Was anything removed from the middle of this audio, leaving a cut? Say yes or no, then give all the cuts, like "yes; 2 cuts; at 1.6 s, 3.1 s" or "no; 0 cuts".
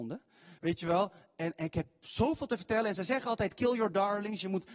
no; 0 cuts